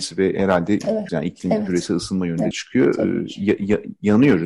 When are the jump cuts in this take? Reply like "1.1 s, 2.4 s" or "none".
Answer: 1.1 s, 2.5 s